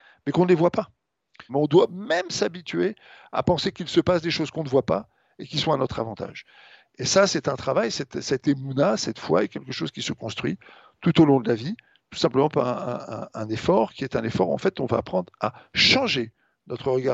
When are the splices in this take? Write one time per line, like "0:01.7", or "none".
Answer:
0:01.5